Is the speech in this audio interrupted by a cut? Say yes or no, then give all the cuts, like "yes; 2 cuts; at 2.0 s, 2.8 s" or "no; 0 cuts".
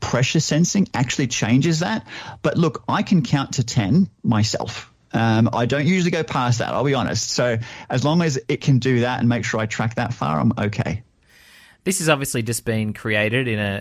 no; 0 cuts